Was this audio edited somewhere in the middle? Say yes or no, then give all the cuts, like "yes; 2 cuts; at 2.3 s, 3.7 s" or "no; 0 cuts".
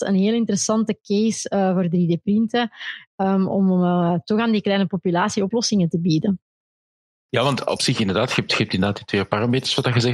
yes; 1 cut; at 7.3 s